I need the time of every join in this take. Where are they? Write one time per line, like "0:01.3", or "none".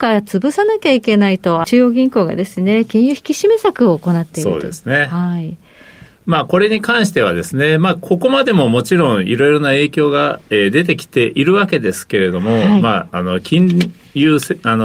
0:01.6